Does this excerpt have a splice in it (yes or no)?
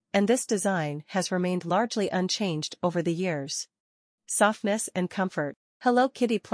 yes